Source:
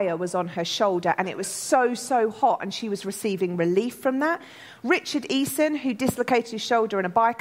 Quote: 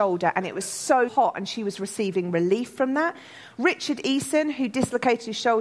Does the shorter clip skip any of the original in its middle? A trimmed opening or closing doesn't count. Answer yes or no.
yes